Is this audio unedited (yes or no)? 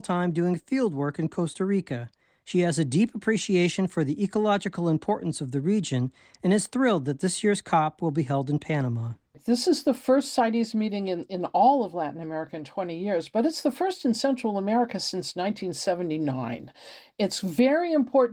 yes